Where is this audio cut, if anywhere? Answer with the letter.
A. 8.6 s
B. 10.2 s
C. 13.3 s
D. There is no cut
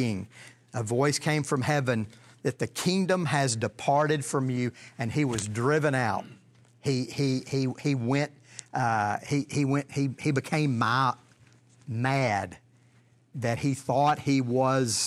C